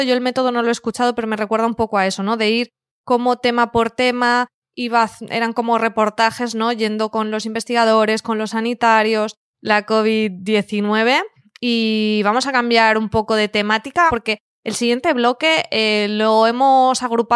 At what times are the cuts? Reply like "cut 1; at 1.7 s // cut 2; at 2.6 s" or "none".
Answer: cut 1; at 9.5 s // cut 2; at 14.1 s